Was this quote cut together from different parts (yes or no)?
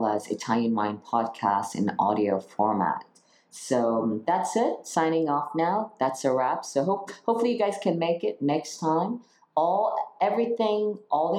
no